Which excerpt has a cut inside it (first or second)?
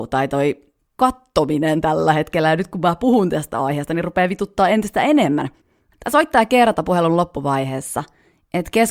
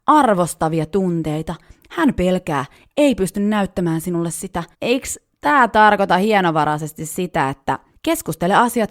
second